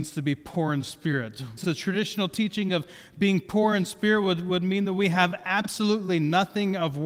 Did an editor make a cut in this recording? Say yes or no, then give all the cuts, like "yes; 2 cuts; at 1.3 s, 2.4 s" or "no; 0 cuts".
yes; 1 cut; at 1.6 s